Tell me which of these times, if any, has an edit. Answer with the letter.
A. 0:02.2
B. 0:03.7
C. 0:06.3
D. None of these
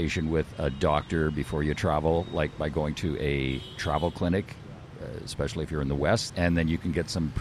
C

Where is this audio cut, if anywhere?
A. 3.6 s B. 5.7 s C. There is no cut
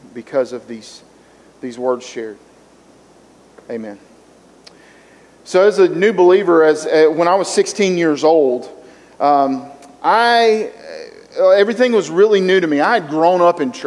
A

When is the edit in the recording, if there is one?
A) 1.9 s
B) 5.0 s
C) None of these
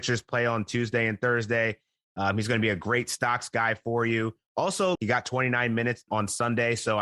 B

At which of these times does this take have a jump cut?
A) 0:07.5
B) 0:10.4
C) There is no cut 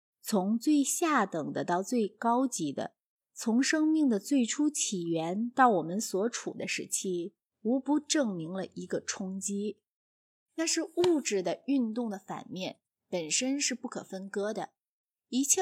A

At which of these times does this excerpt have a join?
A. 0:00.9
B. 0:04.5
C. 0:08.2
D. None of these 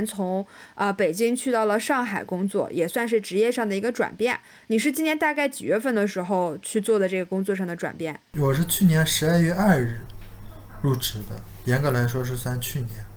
D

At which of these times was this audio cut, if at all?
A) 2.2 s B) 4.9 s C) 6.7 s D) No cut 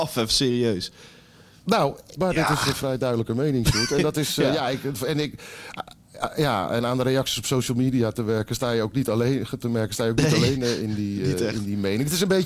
A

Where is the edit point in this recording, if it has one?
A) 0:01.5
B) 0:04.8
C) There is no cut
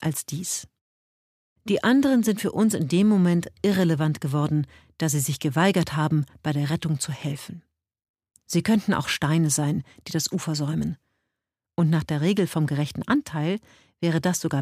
A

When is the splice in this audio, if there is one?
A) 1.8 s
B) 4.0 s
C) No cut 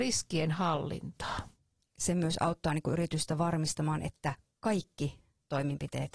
A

